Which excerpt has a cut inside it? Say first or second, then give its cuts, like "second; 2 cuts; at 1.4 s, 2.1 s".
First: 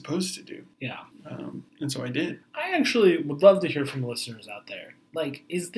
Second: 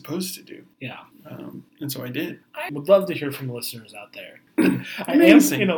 second; 2 cuts; at 2.7 s, 4.5 s